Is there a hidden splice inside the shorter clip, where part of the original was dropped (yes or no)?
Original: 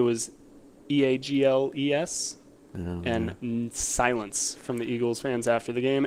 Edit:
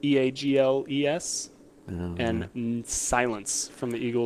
no